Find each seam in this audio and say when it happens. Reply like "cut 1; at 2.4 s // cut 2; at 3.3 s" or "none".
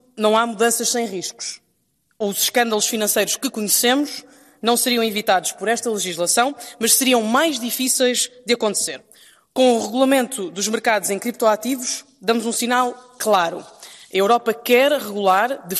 none

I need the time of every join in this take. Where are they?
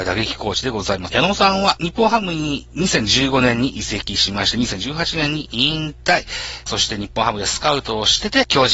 cut 1; at 1.1 s // cut 2; at 6.7 s

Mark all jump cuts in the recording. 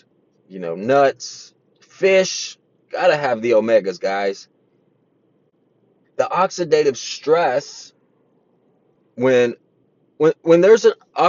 cut 1; at 6.0 s // cut 2; at 9.1 s

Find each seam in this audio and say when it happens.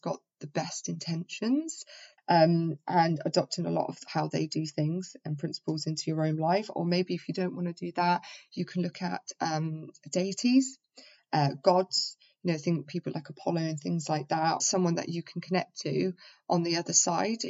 cut 1; at 2.2 s // cut 2; at 14.6 s

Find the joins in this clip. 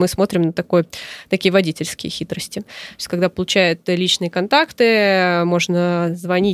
cut 1; at 2.7 s

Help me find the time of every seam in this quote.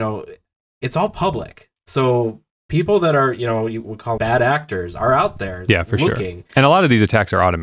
cut 1; at 4.2 s

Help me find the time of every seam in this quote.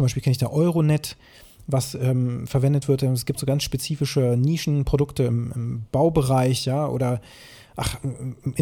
none

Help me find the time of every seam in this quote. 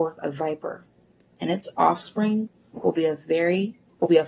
none

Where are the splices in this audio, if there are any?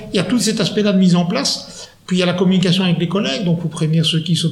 none

